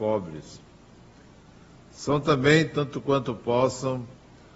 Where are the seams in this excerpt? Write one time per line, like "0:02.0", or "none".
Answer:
none